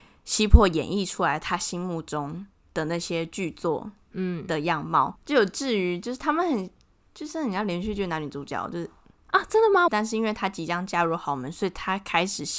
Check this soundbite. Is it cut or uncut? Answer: cut